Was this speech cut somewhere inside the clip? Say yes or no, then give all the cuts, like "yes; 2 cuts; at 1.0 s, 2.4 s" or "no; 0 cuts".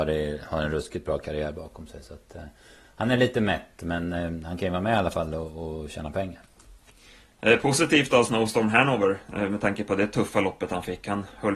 no; 0 cuts